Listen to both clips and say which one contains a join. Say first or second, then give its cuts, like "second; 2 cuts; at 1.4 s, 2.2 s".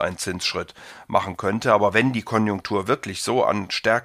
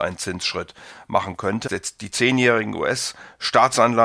second; 1 cut; at 1.7 s